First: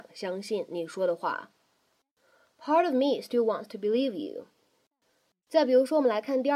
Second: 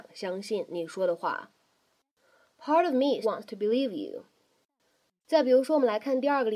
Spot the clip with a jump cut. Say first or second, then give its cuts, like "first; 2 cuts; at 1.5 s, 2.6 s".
second; 1 cut; at 3.2 s